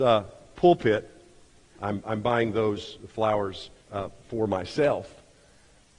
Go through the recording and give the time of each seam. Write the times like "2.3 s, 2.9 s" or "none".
1.7 s, 3.8 s